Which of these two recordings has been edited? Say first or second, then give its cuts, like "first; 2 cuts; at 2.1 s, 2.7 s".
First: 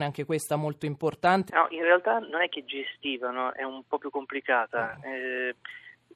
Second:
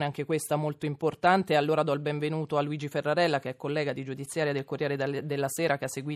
first; 1 cut; at 1.5 s